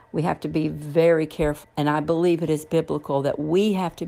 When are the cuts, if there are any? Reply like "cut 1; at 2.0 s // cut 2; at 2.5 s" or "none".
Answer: cut 1; at 1.6 s